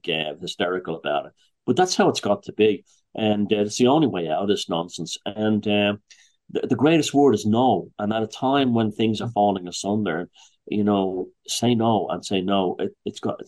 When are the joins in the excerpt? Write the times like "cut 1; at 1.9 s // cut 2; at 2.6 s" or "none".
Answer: none